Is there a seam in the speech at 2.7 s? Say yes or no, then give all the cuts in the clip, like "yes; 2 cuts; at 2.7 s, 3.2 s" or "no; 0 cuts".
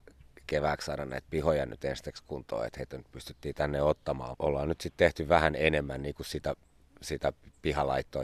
no; 1 cut; at 4.3 s